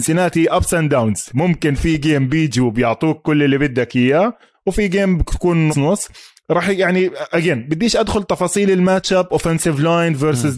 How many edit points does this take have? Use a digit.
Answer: 1